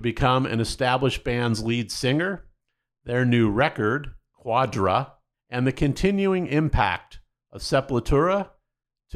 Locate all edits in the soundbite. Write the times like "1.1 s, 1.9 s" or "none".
none